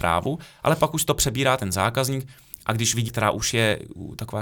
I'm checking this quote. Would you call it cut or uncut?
cut